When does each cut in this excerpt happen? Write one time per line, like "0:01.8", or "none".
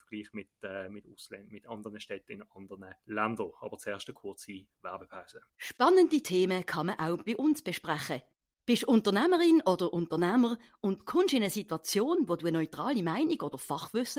0:03.0